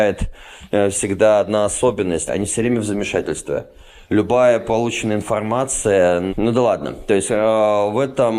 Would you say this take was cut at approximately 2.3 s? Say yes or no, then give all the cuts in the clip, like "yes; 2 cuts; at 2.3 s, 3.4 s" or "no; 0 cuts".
yes; 2 cuts; at 2.3 s, 6.3 s